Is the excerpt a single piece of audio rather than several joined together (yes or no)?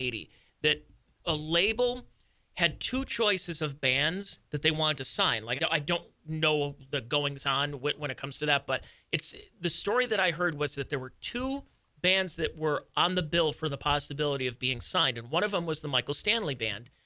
no